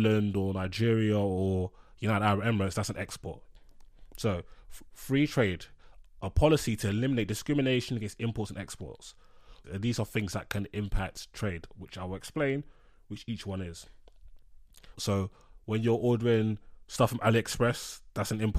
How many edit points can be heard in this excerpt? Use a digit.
2